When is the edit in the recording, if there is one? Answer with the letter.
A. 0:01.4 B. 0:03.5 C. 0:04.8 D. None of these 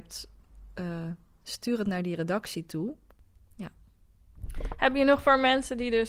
A